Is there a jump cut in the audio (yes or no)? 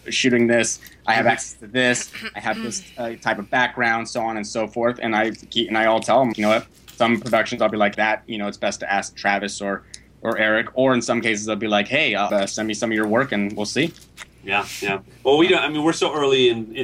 yes